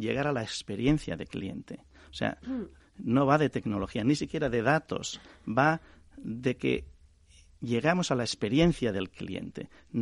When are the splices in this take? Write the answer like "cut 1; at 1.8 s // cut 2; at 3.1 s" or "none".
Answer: cut 1; at 2.8 s